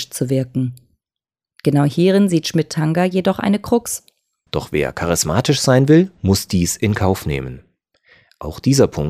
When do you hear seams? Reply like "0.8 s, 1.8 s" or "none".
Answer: 4.5 s